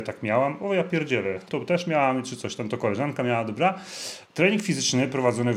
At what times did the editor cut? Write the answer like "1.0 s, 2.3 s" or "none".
1.5 s, 4.3 s